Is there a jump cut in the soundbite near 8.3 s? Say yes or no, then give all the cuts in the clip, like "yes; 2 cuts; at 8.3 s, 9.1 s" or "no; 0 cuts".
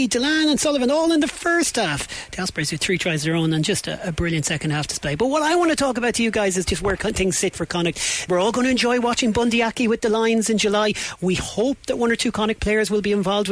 yes; 1 cut; at 8.3 s